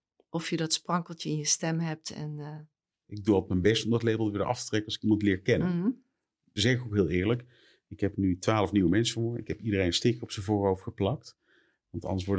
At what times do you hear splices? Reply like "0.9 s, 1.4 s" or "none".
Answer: 3.0 s, 6.6 s